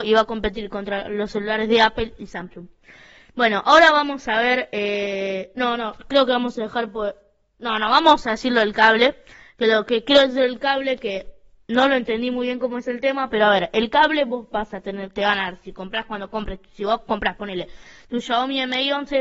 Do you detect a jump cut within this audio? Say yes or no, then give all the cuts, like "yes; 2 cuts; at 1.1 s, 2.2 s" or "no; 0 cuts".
no; 0 cuts